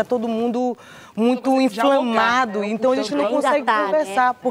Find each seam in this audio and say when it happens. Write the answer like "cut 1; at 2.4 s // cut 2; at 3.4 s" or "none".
none